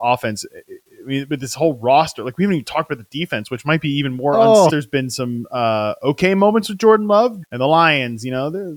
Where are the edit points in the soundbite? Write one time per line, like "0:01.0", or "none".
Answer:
0:04.7
0:07.4